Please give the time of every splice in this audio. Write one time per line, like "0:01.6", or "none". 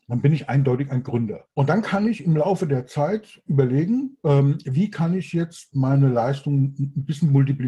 0:01.5
0:04.2